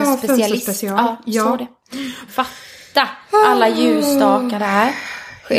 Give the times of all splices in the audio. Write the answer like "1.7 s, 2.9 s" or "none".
2.3 s